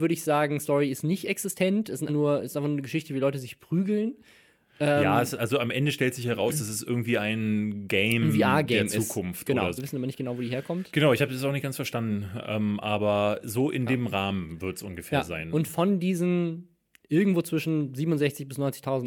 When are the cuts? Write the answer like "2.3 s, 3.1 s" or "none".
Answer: 2.1 s, 9.8 s